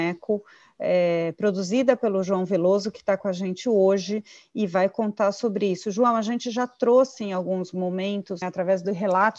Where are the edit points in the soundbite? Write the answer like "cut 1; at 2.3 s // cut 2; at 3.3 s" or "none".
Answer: cut 1; at 8.4 s